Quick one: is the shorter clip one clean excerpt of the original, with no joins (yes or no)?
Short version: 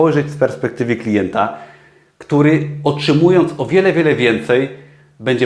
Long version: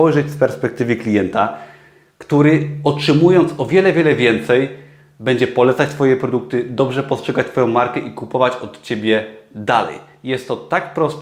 yes